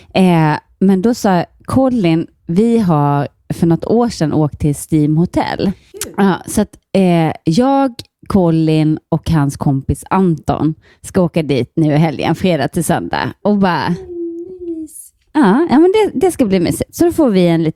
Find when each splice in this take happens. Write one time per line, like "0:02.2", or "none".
0:05.9